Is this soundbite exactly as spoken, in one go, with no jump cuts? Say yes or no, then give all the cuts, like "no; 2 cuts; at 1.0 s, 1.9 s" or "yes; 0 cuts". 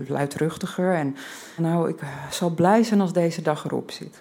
no; 1 cut; at 1.6 s